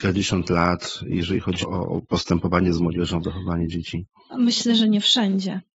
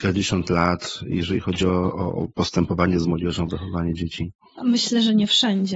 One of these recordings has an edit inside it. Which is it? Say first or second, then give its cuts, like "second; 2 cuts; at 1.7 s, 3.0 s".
first; 1 cut; at 1.6 s